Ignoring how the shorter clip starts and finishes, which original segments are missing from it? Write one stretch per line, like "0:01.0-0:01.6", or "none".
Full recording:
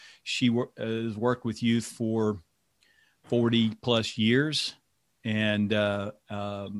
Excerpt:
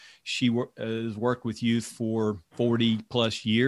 0:02.4-0:03.2